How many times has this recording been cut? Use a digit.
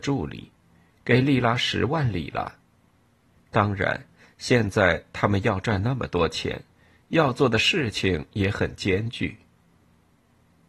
1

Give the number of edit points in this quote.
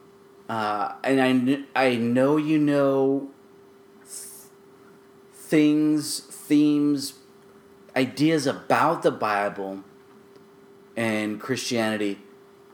1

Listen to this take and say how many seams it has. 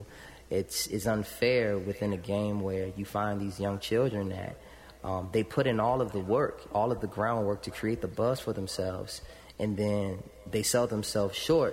0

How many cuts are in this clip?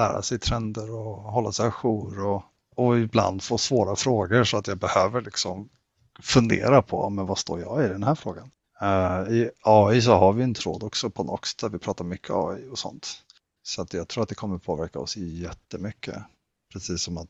2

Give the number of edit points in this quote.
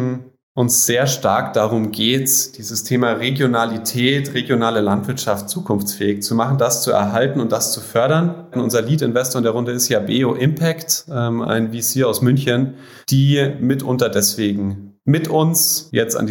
2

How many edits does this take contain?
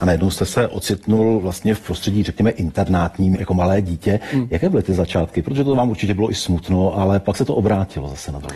1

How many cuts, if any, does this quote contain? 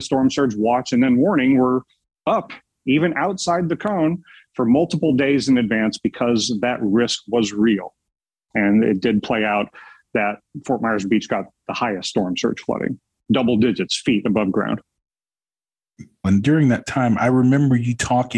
1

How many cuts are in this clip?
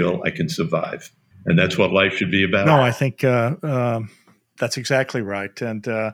1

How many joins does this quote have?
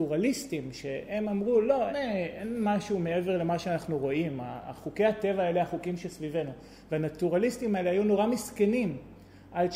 1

